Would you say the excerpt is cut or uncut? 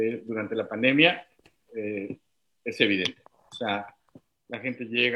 uncut